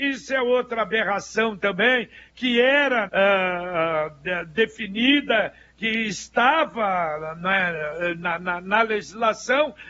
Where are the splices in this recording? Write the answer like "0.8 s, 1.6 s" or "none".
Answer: 3.1 s